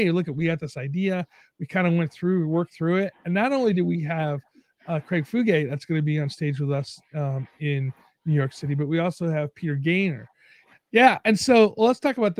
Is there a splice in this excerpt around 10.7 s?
yes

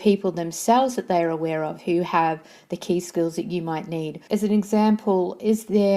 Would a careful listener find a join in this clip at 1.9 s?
no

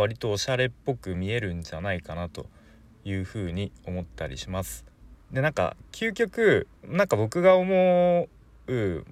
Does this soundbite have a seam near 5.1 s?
yes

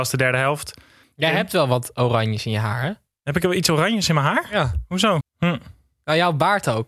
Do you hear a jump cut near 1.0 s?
yes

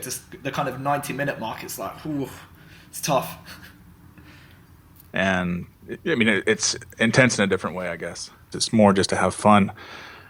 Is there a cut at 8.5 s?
yes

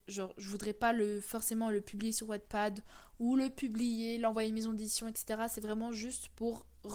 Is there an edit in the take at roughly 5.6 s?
no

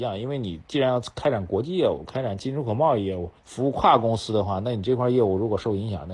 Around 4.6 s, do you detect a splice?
no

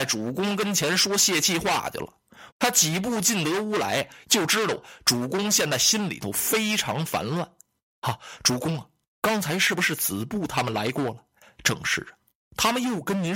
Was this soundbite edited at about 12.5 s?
no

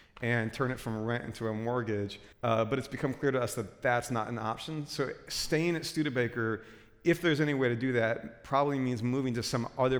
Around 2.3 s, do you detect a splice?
yes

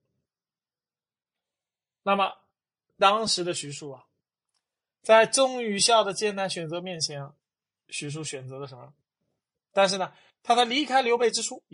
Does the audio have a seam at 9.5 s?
yes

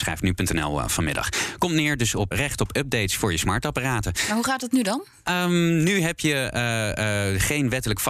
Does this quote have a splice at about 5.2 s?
no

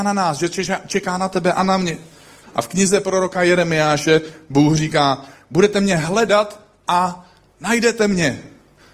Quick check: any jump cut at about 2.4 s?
yes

